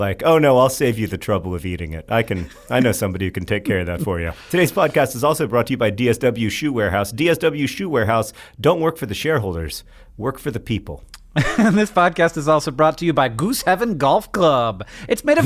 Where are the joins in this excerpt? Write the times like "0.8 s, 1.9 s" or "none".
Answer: none